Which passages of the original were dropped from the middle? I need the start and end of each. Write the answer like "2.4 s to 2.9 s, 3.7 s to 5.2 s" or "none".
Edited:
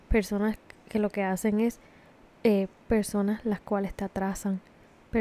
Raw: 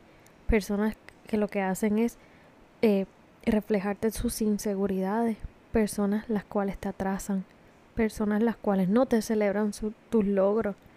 3.2 s to 5.7 s